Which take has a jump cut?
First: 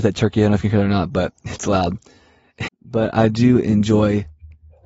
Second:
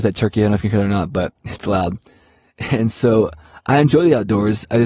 first; 1 cut; at 2.7 s

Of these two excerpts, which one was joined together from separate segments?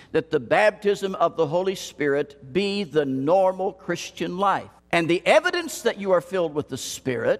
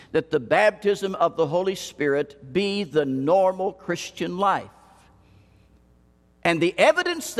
first; 1 cut; at 4.8 s

